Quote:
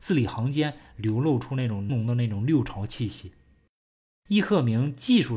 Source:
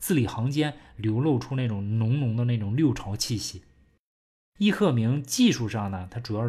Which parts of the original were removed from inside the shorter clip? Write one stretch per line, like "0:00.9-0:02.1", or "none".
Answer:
0:01.9-0:02.2